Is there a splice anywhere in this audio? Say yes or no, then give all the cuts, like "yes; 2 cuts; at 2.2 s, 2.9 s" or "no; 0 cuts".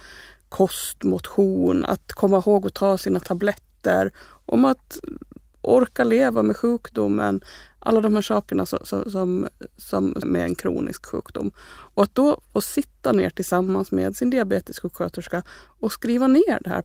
yes; 1 cut; at 10.2 s